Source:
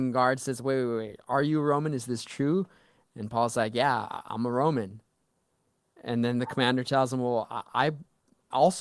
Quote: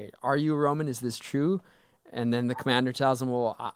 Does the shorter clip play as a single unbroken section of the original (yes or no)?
no